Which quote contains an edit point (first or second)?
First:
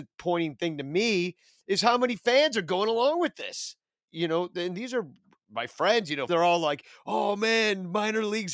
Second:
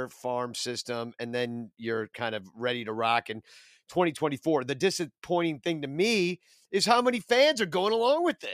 first